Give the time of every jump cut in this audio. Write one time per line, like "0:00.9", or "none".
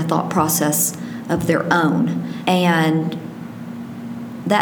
0:02.4